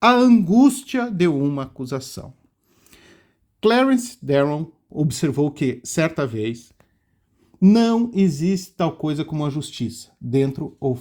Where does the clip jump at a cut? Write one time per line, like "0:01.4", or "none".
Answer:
none